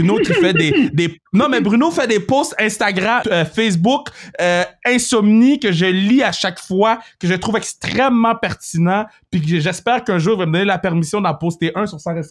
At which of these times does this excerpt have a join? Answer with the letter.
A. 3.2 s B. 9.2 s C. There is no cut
A